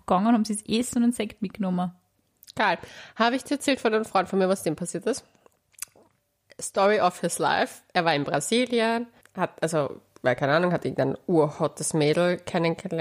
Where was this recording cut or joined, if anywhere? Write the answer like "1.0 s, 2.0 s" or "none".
9.2 s

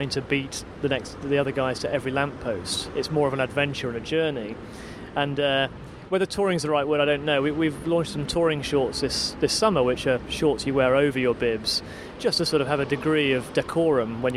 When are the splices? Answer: none

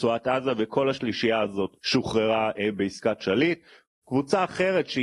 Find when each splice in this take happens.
1.7 s

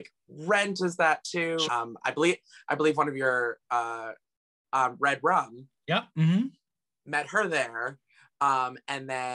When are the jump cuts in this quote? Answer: 1.6 s, 4.6 s

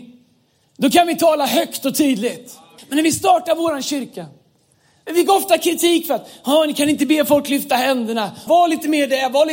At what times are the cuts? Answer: 2.8 s, 8.5 s

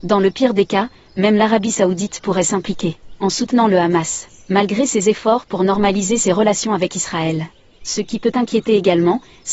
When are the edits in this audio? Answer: 7.8 s

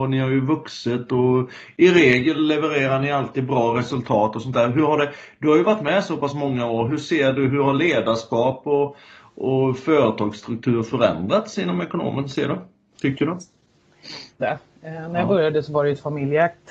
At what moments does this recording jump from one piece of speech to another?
14.4 s

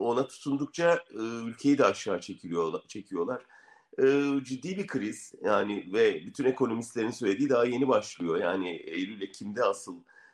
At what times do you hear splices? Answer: none

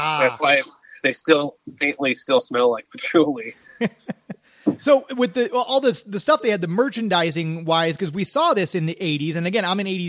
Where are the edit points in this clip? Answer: 1.0 s

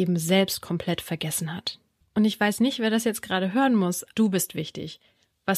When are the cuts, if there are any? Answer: 2.0 s, 4.1 s

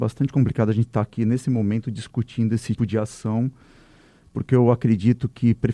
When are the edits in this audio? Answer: 2.8 s

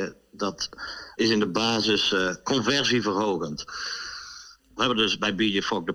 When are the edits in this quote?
1.2 s, 4.6 s

